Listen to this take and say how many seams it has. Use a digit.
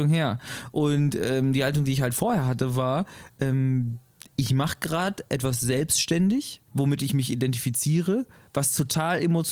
1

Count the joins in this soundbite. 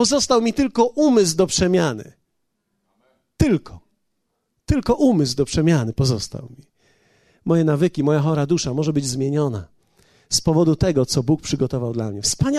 0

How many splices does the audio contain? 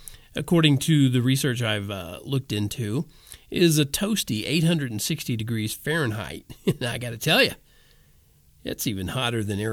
0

